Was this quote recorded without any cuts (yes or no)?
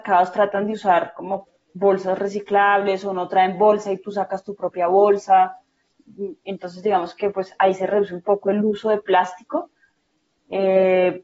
yes